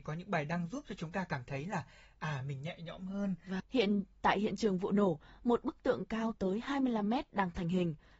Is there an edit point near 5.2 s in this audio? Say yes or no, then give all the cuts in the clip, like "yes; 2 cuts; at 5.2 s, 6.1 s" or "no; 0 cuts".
no; 1 cut; at 3.6 s